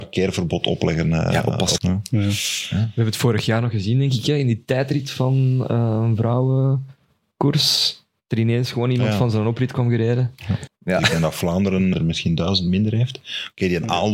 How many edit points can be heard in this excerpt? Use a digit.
3